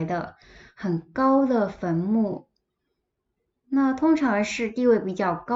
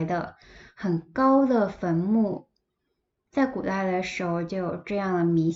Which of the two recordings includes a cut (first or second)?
second